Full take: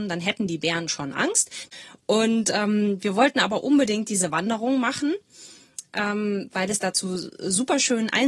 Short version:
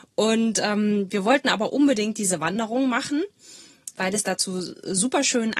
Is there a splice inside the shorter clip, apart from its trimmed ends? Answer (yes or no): yes